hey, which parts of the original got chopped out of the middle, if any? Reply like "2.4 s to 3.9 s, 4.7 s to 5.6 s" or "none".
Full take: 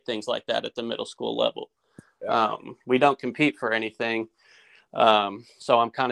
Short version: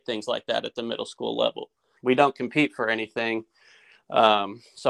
2.0 s to 2.8 s